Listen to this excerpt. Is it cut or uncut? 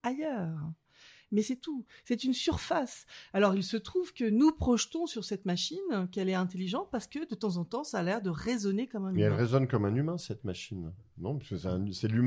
uncut